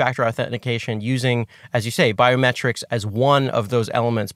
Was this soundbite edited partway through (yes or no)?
no